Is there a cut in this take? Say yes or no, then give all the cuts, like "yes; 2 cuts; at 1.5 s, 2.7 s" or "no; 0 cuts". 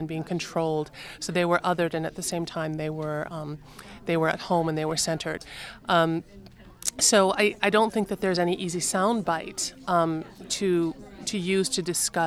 no; 0 cuts